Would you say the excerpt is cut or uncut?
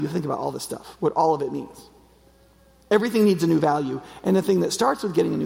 uncut